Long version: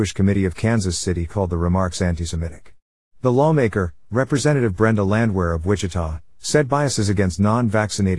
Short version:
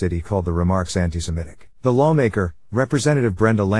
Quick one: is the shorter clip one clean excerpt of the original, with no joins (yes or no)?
no